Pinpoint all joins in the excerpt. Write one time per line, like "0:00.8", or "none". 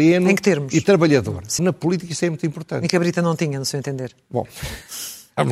0:01.6